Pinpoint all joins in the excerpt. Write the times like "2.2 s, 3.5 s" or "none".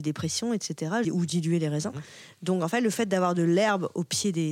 1.0 s